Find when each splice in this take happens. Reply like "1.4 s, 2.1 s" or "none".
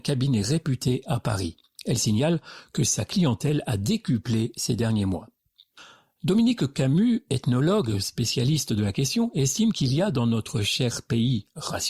none